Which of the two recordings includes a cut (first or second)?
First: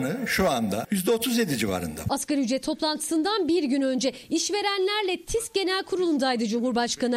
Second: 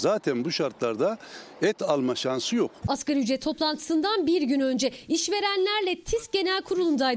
second